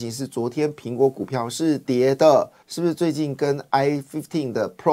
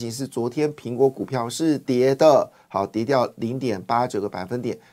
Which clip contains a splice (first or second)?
first